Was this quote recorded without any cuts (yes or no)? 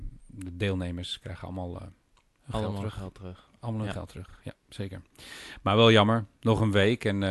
yes